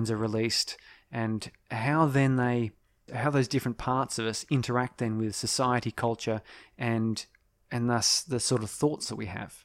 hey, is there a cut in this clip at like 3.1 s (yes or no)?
yes